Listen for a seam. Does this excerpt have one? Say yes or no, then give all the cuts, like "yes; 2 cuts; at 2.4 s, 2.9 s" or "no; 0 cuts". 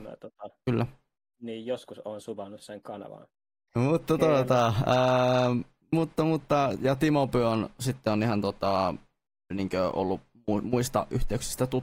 yes; 1 cut; at 3.7 s